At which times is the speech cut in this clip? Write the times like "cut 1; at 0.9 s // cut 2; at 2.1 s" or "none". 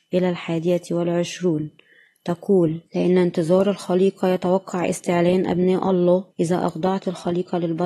cut 1; at 2.9 s // cut 2; at 6.3 s